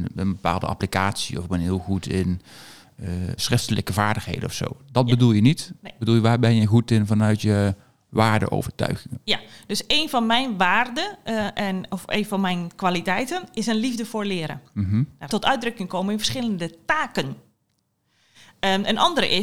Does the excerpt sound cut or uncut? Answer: cut